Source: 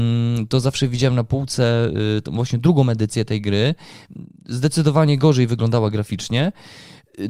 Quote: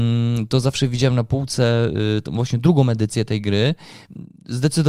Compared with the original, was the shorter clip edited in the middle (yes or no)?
no